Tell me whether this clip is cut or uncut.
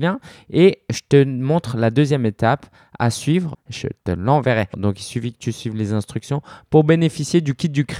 cut